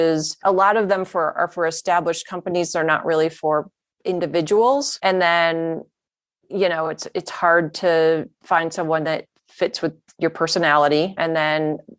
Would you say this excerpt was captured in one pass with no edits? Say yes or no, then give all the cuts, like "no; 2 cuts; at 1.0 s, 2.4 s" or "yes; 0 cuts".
yes; 0 cuts